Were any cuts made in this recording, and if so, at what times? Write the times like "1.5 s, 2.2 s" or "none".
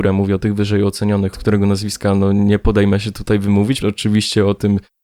1.3 s, 3.8 s